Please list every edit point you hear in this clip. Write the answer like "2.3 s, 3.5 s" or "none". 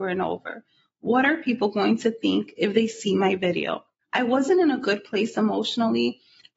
4.0 s

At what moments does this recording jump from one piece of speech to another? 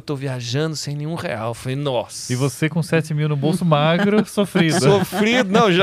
none

